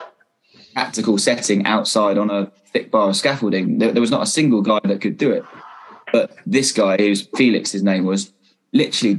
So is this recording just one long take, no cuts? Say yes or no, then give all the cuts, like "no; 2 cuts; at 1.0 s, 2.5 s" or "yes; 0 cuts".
yes; 0 cuts